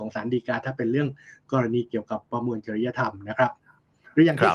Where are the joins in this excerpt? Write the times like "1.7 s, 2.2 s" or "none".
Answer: none